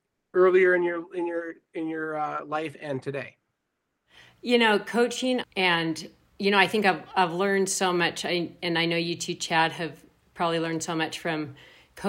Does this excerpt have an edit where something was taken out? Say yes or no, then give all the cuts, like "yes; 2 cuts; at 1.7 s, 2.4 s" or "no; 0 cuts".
yes; 1 cut; at 5.4 s